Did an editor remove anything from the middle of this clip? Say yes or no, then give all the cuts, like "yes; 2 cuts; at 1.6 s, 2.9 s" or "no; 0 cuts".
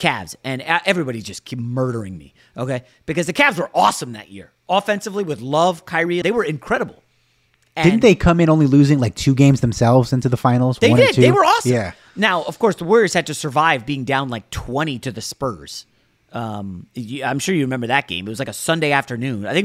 yes; 1 cut; at 6.2 s